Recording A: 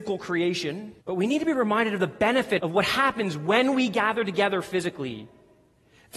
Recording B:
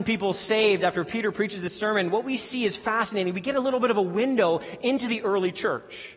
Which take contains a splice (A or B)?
A